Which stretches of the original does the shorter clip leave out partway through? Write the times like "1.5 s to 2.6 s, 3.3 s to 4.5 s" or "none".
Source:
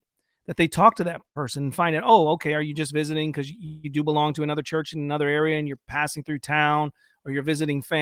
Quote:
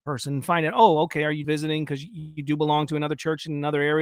2.7 s to 2.9 s